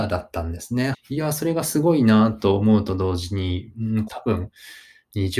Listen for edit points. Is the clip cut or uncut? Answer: cut